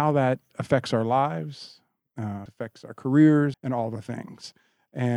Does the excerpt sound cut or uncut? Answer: cut